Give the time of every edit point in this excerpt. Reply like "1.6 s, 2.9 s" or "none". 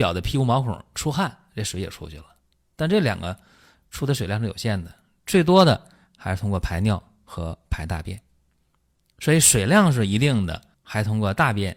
10.7 s

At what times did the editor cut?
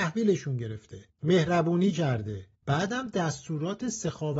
1.1 s, 2.6 s

